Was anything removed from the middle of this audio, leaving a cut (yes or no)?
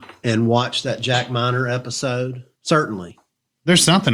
yes